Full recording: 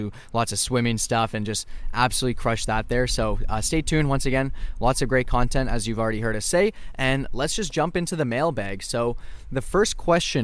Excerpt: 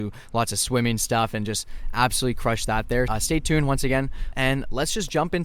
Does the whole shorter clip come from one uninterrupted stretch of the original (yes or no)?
no